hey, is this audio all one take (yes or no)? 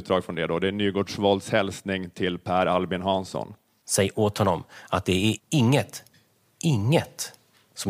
no